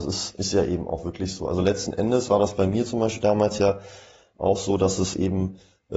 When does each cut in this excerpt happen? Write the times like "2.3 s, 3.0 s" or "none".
none